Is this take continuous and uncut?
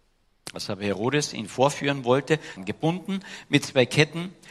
no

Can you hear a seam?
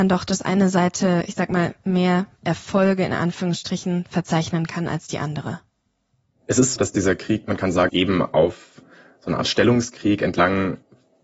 yes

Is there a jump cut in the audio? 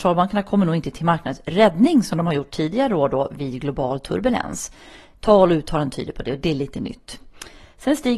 no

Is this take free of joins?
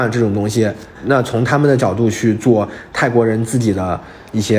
no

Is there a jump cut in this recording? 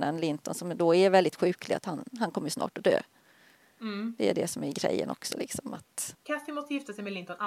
yes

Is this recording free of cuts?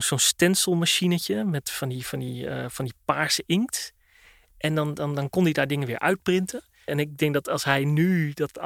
no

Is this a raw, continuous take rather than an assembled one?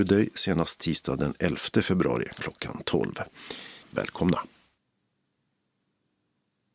no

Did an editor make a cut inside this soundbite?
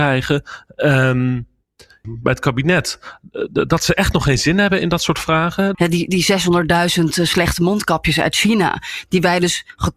yes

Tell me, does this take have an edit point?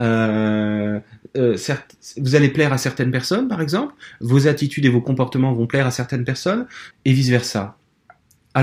yes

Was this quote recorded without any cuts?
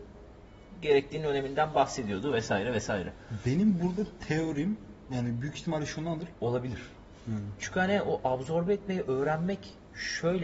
no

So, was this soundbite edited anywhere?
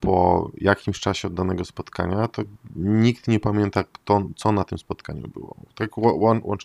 no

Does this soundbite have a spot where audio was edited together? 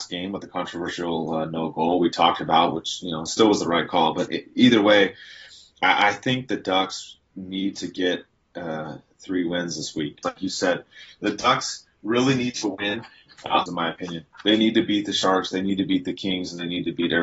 yes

